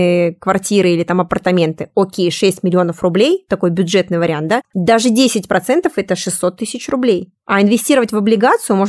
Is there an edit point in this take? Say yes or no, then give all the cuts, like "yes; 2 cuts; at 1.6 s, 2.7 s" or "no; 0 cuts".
no; 0 cuts